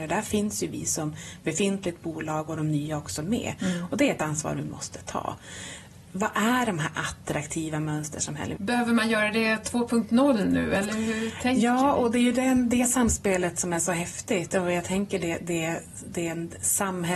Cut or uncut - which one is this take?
cut